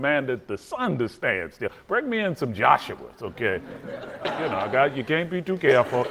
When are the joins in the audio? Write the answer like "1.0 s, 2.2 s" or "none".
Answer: 4.2 s